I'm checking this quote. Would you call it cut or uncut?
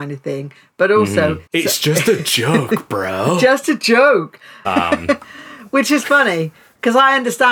cut